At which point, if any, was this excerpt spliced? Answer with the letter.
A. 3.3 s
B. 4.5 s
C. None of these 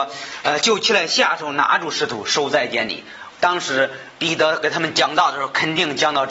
A